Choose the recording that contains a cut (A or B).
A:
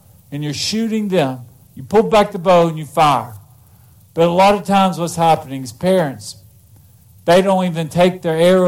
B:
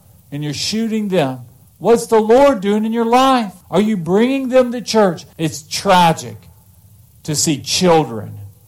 B